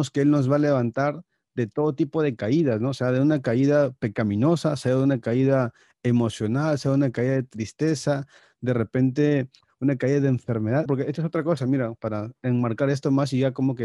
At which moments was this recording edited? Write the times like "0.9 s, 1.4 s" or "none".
10.9 s, 12.0 s

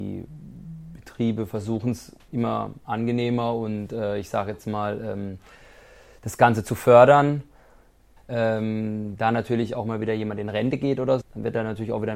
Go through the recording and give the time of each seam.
2.3 s, 8.2 s, 11.2 s

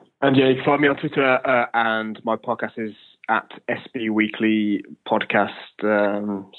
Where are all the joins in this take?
1.7 s

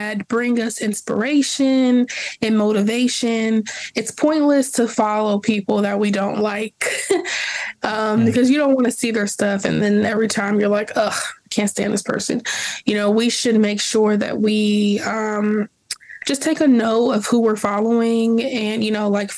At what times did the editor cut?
none

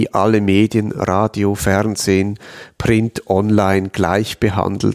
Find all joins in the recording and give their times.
none

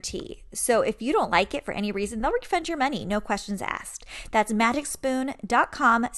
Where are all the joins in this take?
none

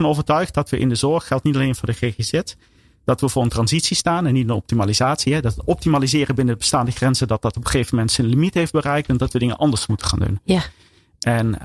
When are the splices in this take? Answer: none

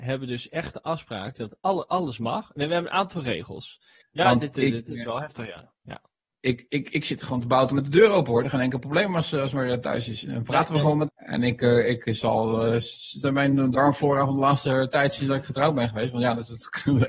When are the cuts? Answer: 4.0 s, 11.1 s, 13.2 s

